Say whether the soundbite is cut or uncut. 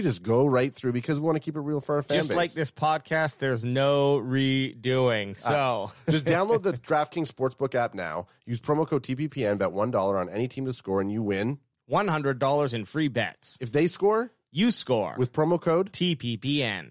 uncut